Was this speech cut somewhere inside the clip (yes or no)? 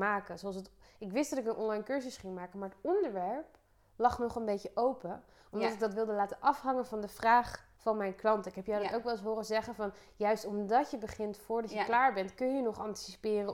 yes